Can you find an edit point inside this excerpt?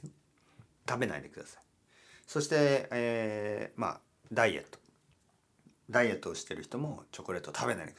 no; 0 cuts

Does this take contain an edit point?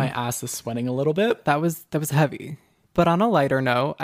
yes; 2 cuts; at 1.4 s, 2.8 s

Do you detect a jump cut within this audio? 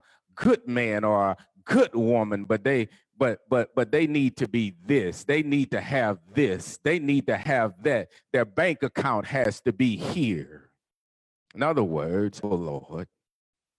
yes; 2 cuts; at 11.3 s, 12.4 s

